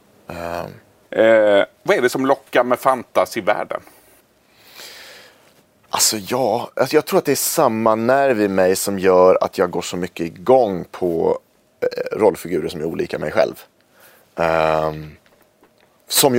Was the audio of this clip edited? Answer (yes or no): yes